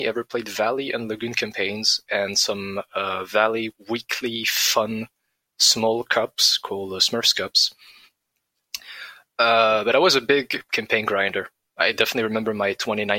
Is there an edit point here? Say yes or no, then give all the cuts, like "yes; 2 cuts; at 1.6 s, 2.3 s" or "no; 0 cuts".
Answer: no; 0 cuts